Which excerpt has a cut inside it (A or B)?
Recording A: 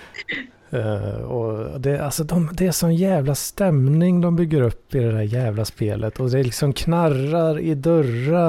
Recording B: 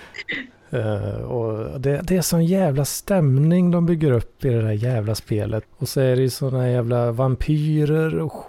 B